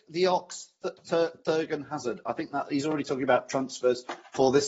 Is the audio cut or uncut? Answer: uncut